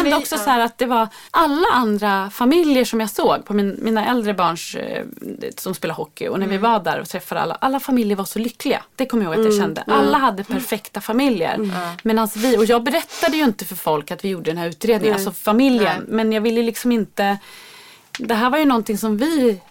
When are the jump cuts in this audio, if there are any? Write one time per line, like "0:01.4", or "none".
0:01.3

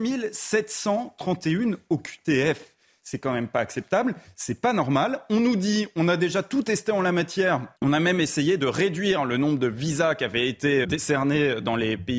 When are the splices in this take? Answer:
0:07.8
0:10.8

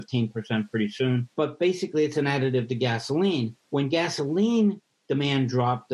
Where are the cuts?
0:01.3
0:03.6

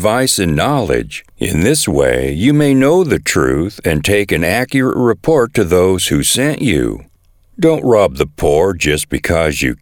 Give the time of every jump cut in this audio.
0:01.3

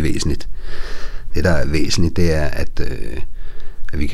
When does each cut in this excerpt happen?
none

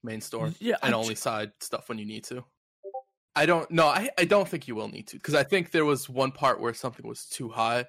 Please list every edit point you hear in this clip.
0:03.2
0:05.2

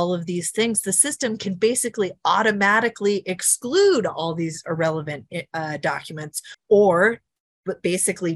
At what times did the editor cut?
none

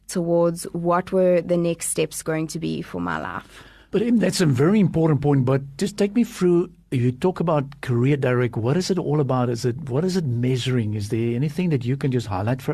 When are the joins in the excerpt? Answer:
none

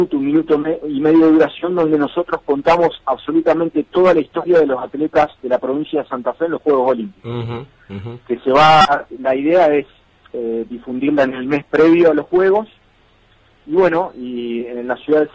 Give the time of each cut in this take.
none

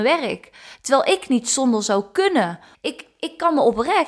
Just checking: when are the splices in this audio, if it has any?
0:02.7

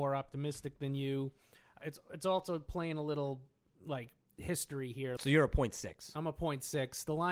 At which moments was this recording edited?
0:05.2

